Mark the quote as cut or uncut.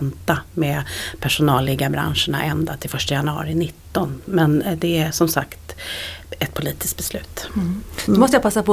uncut